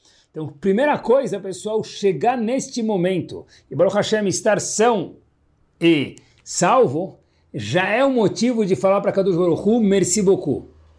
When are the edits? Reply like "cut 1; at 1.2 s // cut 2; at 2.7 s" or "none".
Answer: none